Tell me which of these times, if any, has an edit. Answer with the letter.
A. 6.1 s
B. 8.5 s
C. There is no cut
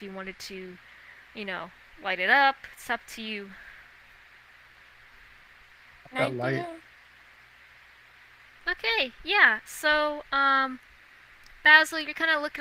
B